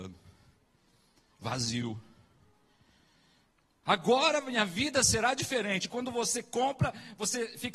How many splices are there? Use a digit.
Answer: 1